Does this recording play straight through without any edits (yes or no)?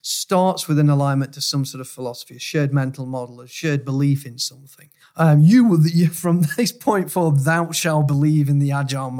no